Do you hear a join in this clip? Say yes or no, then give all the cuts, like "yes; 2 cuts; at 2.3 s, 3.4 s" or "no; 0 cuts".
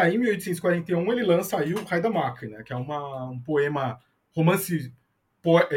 no; 0 cuts